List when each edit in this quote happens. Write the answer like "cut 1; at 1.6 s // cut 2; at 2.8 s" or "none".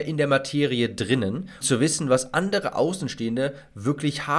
cut 1; at 1.6 s